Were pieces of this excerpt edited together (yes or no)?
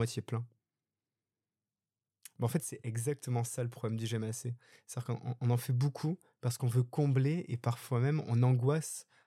no